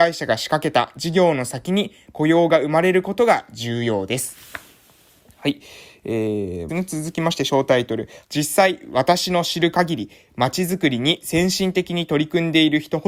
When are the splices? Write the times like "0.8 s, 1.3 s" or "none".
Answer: 6.7 s, 8.2 s